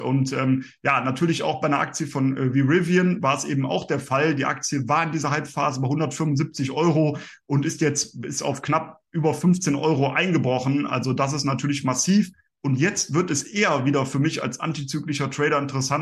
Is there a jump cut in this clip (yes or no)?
no